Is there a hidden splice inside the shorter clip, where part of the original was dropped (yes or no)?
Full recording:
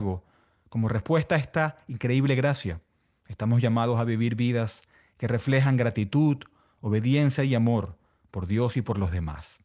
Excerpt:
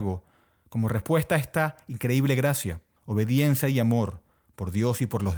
yes